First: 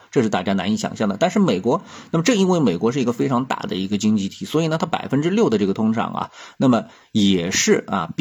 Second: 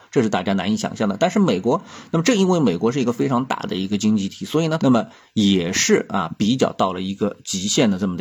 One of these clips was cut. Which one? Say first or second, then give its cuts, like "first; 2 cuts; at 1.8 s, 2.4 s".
second; 1 cut; at 4.8 s